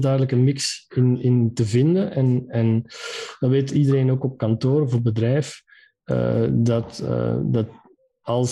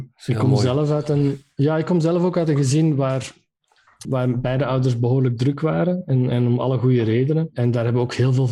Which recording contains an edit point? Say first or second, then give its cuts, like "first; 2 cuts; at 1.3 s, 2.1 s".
second; 2 cuts; at 4.0 s, 7.5 s